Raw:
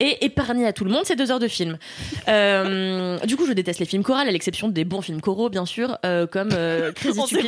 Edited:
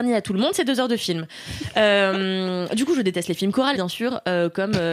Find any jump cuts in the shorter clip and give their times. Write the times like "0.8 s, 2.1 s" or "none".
3.7 s